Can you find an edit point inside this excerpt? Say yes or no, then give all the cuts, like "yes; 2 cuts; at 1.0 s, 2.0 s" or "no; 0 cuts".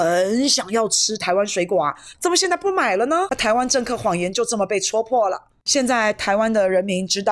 yes; 1 cut; at 2.1 s